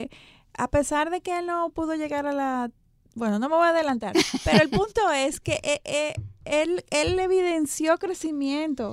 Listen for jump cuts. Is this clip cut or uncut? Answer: uncut